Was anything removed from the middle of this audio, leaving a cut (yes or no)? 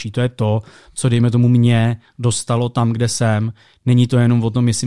no